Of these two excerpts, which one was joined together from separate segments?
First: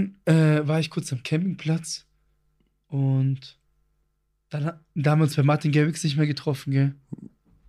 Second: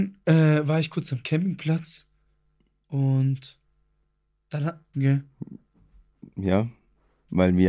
second; 1 cut; at 4.9 s

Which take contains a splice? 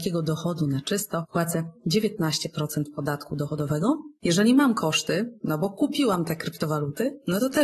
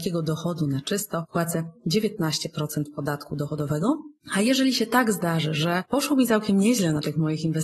first; 1 cut; at 4.2 s

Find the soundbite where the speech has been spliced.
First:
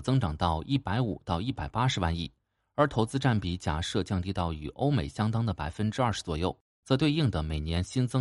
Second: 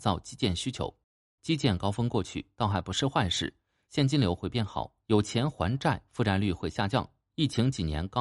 second; 1 cut; at 1.4 s

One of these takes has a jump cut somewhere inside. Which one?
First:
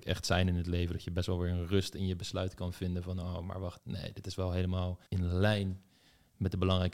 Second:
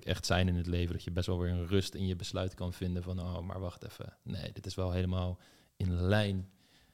first; 2 cuts; at 3.8 s, 5.1 s

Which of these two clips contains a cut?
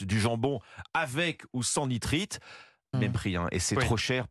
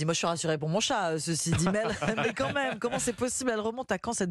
first; 1 cut; at 2.9 s

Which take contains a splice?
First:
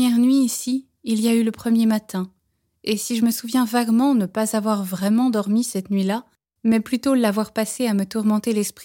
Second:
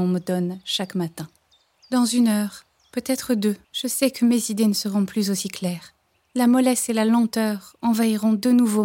second; 1 cut; at 3.6 s

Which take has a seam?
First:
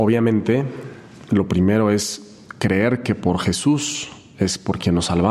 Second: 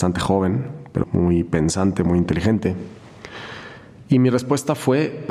second; 1 cut; at 1.0 s

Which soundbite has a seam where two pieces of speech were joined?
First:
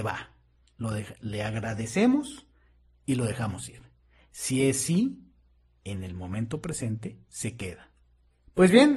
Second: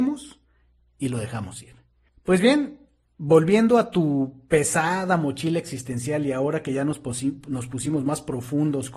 second; 1 cut; at 2.1 s

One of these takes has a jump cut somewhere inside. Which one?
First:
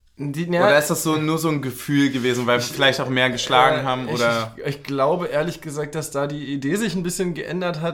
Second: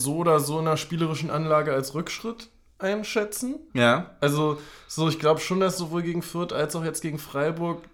second; 1 cut; at 3.7 s

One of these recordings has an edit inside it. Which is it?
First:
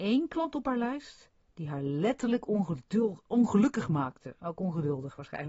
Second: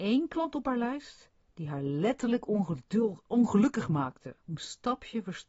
second; 1 cut; at 4.4 s

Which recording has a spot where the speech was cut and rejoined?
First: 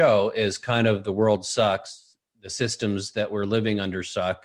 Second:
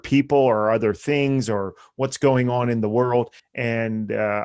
second; 1 cut; at 3.4 s

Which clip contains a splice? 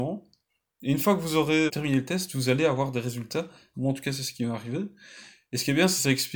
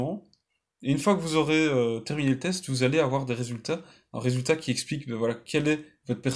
first; 2 cuts; at 1.7 s, 3.7 s

